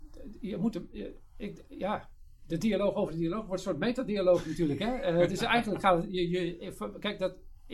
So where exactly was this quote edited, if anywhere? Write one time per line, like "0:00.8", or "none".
none